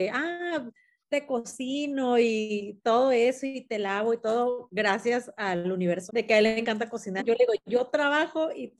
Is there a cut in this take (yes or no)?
yes